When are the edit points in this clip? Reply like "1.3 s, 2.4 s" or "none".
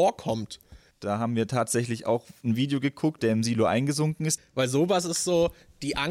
0.9 s, 3.2 s, 4.4 s